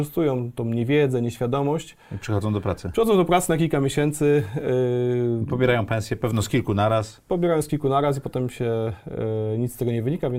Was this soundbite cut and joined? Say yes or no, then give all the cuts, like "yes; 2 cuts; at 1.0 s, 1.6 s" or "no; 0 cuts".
no; 0 cuts